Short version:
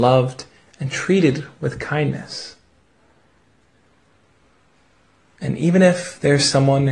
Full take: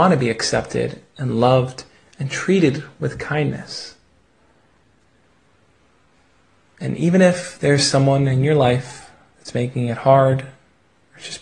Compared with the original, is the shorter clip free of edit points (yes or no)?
yes